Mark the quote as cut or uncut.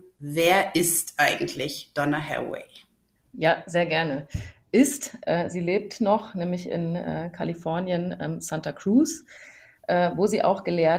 uncut